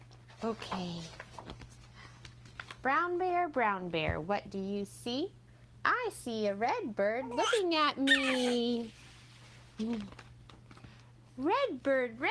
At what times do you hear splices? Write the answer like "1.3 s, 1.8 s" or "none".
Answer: none